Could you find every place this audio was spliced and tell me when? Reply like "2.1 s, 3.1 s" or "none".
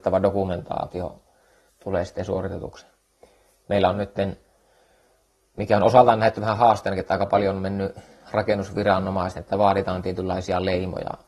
1.7 s